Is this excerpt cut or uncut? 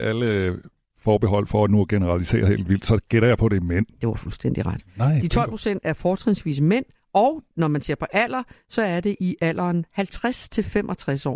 uncut